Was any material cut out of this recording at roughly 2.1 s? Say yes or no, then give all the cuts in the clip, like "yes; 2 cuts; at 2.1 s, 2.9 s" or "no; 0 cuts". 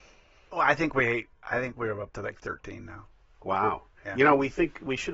no; 0 cuts